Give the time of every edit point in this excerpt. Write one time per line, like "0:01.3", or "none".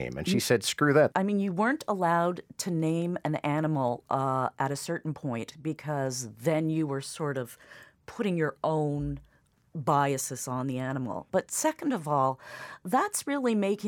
0:01.1
0:11.3

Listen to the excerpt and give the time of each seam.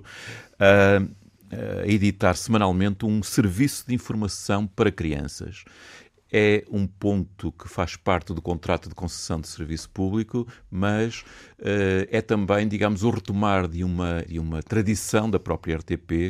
0:14.3

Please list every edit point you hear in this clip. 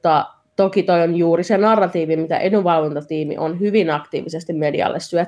none

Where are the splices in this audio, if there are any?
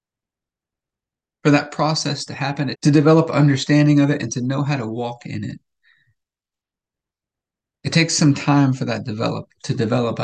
0:02.7

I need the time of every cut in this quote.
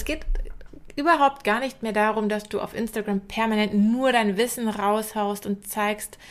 none

